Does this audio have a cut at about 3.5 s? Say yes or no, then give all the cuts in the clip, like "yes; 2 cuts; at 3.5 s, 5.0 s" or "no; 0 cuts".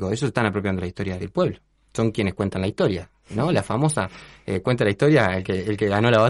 no; 1 cut; at 1.2 s